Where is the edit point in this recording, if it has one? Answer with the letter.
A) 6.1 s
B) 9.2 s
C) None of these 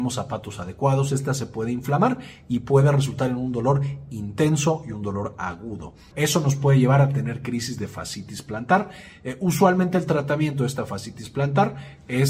A